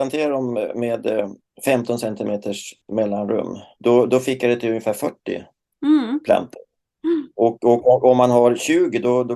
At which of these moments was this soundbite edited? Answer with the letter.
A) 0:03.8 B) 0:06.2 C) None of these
A